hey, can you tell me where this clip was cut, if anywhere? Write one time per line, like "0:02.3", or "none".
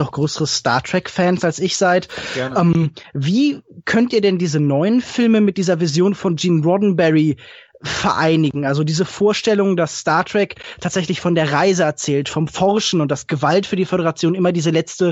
none